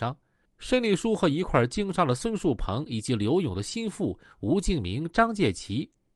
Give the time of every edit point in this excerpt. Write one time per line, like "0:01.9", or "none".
none